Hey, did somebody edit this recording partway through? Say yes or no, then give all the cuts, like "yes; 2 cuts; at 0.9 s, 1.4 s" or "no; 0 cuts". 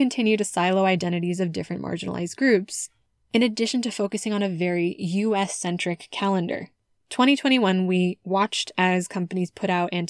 no; 0 cuts